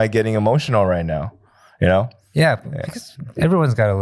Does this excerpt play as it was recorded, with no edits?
yes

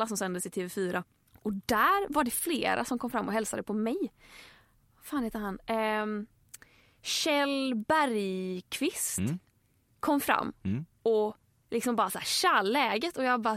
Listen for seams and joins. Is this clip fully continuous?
yes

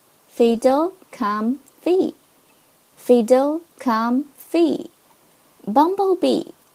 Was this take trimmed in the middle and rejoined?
yes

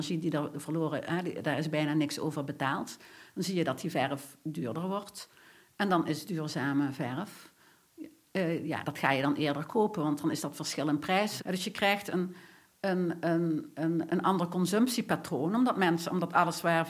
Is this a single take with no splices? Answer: no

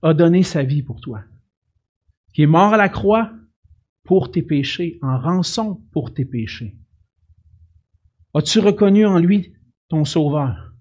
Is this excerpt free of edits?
yes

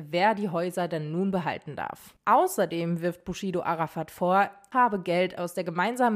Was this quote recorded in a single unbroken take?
no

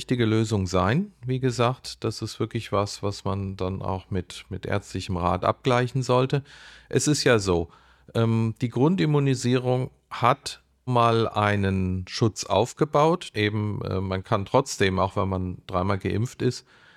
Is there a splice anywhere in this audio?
yes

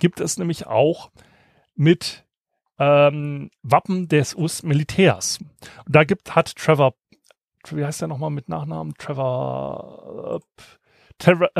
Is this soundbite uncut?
yes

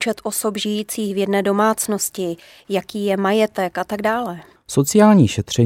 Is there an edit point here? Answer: yes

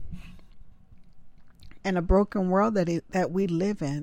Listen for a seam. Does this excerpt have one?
yes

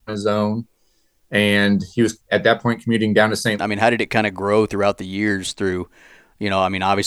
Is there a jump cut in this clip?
yes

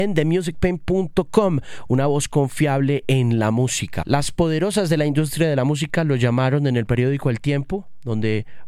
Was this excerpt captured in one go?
no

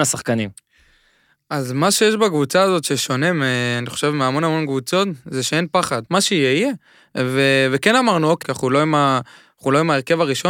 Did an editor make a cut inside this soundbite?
yes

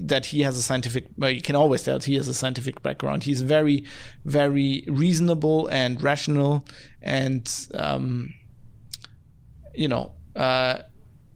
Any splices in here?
no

